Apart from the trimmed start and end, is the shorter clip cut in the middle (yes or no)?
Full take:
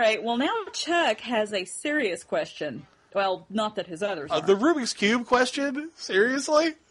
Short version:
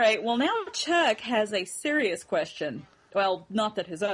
no